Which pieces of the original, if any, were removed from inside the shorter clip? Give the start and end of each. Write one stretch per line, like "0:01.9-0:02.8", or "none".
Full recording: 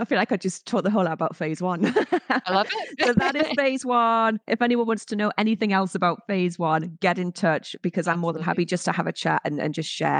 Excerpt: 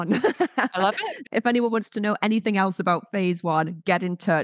0:03.0-0:04.4

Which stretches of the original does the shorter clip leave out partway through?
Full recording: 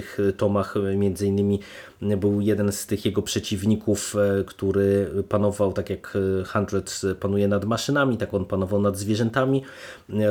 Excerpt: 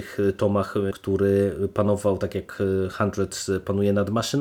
0:00.9-0:04.5

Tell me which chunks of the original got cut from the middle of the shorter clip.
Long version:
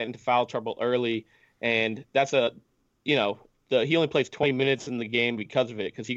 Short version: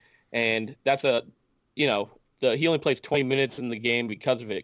none

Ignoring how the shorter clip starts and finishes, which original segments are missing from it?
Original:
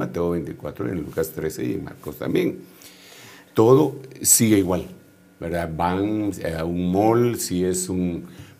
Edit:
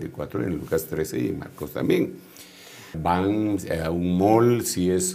0:03.4-0:05.7

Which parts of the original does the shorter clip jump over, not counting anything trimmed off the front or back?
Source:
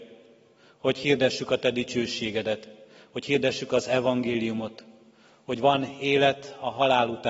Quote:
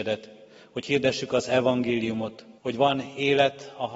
0:05.0-0:05.4

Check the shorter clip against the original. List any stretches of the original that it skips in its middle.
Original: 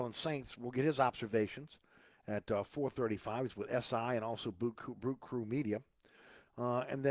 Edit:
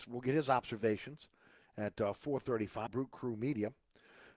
0:03.4-0:05.0

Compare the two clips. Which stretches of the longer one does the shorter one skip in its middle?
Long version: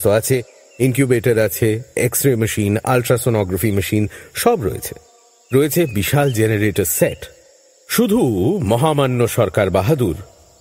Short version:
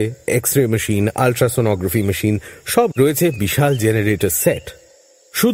0:04.6-0:05.5

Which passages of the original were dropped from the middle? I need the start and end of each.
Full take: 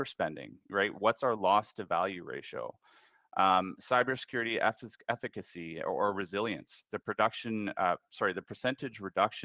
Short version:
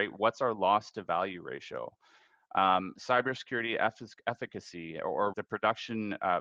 0:06.1-0:06.9

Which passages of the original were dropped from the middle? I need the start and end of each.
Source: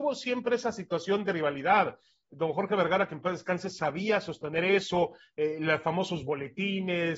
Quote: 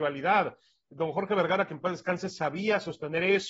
none

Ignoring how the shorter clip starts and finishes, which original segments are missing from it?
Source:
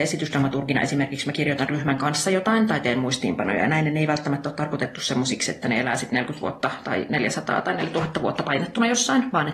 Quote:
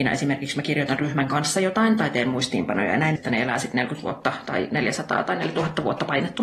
0:03.9-0:05.5

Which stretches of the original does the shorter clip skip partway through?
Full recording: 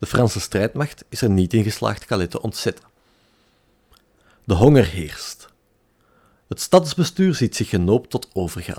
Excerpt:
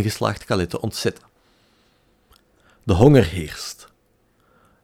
none

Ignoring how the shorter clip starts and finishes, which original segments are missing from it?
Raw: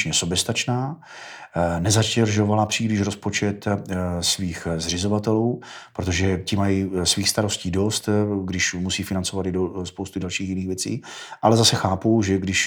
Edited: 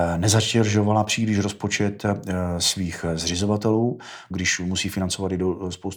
0:05.9-0:08.4

